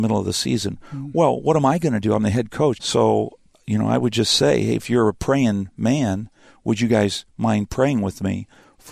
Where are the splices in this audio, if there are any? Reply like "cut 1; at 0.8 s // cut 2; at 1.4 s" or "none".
cut 1; at 2.7 s